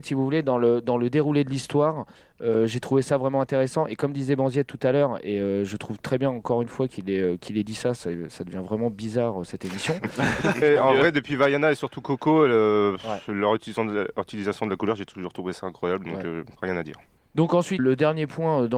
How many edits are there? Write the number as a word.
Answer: three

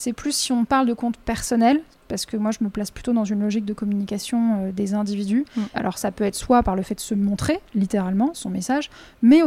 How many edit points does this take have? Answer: two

